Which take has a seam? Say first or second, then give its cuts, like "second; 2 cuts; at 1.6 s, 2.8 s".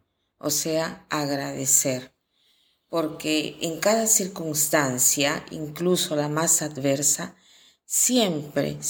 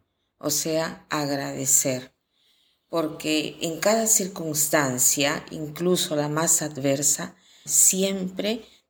second; 1 cut; at 7.7 s